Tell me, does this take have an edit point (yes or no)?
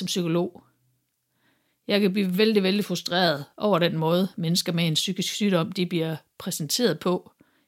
no